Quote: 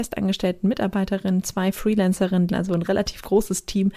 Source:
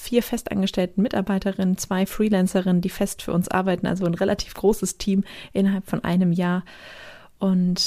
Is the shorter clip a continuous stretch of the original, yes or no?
no